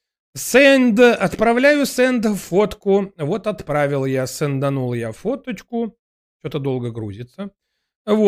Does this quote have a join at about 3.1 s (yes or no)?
no